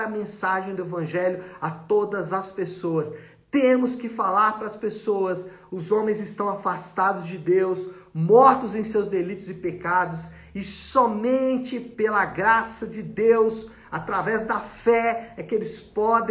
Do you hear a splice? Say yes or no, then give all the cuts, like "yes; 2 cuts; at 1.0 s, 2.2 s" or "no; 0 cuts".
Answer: no; 0 cuts